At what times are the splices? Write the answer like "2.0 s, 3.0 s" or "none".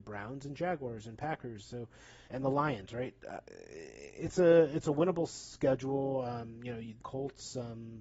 2.3 s, 7.0 s